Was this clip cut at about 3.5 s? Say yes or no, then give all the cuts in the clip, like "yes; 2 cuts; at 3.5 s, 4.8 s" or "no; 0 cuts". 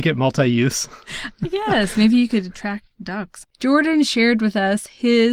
yes; 1 cut; at 3.5 s